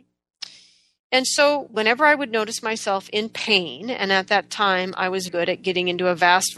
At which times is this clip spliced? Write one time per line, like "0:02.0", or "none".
0:01.7
0:05.3